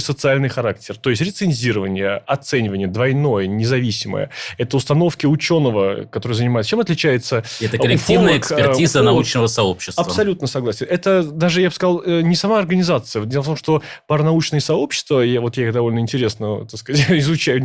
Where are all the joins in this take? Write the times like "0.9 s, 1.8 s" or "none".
none